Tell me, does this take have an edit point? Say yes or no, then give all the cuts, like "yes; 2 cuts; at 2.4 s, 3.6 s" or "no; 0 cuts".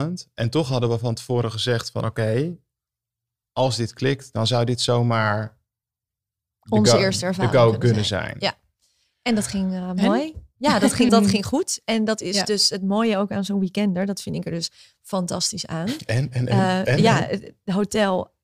yes; 1 cut; at 11.1 s